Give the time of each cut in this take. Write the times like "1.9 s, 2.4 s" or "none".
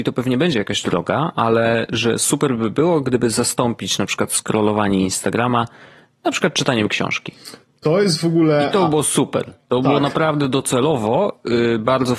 none